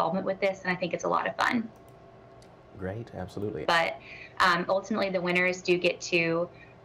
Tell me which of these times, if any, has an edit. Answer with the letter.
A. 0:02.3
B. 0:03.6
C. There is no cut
B